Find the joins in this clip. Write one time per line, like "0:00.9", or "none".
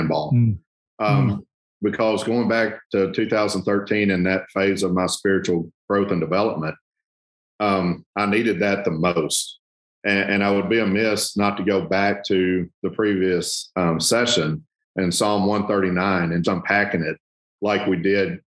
0:16.4